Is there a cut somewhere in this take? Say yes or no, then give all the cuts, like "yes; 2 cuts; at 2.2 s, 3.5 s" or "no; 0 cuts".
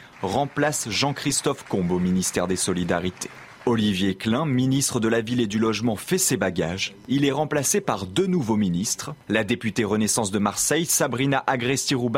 no; 0 cuts